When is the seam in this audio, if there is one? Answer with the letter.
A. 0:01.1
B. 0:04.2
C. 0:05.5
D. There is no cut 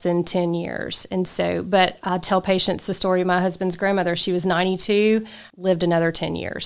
C